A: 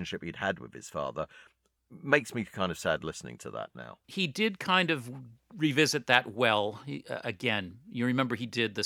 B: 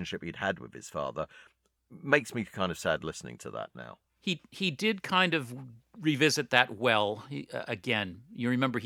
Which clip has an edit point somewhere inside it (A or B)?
A